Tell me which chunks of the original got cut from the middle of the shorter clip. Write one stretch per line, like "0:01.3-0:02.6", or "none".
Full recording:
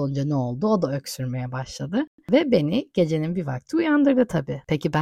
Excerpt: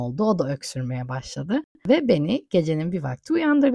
none